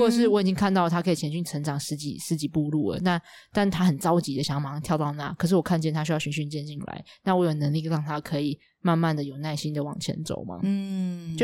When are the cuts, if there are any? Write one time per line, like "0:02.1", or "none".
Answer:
none